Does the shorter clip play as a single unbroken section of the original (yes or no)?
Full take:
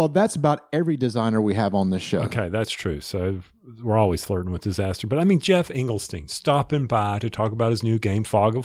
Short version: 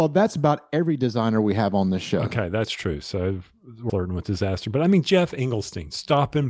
no